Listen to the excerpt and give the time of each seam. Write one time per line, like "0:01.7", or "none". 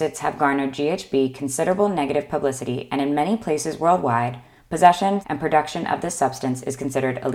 0:05.2